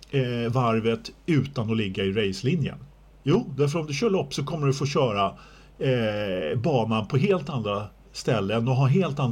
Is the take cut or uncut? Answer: cut